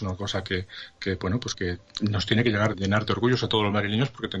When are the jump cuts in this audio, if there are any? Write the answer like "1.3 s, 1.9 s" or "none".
1.5 s, 2.7 s